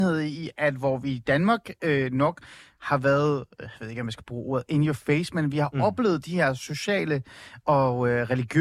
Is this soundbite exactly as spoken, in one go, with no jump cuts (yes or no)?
yes